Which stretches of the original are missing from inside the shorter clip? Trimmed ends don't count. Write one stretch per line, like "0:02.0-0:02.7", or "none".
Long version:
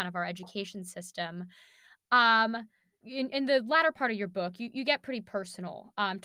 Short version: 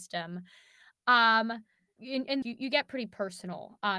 0:03.5-0:04.6